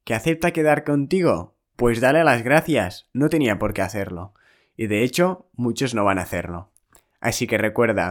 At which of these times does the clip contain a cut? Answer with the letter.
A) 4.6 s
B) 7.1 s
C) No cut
C